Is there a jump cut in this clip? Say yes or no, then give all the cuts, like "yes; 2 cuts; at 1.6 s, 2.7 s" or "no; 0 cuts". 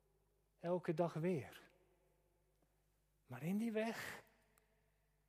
no; 0 cuts